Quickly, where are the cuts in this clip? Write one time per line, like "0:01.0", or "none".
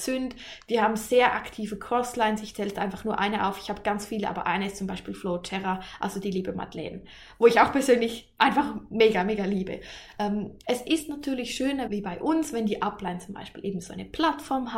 0:10.6
0:11.9